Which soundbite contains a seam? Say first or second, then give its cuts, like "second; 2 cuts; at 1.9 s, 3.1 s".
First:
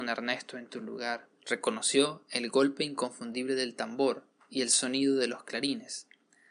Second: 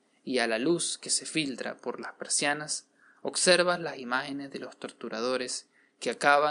first; 1 cut; at 1.4 s